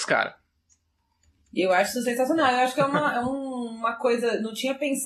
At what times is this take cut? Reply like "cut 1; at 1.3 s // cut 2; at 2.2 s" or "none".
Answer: none

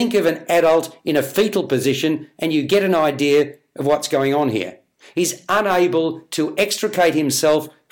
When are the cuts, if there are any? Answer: none

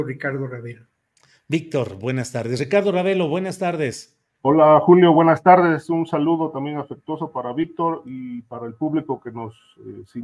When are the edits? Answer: none

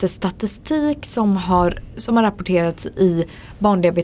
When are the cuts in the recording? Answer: cut 1; at 1.9 s

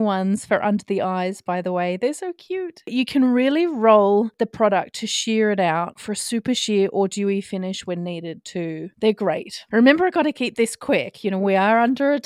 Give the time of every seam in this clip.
cut 1; at 9.7 s

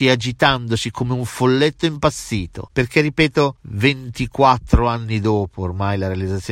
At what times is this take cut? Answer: cut 1; at 2.7 s

